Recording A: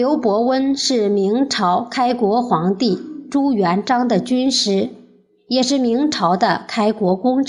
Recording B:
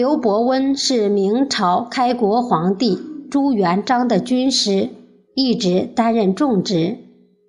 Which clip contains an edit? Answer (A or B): B